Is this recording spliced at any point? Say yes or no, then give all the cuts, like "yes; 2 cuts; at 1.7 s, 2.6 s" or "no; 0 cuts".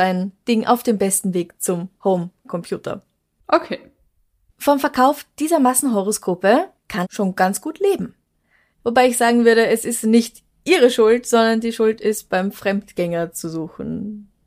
yes; 2 cuts; at 7.0 s, 8.7 s